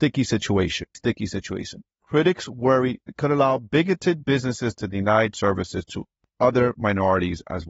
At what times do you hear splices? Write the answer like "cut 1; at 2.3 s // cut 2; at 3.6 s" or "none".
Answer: cut 1; at 0.9 s

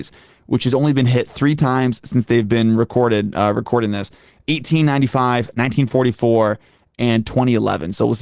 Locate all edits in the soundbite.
none

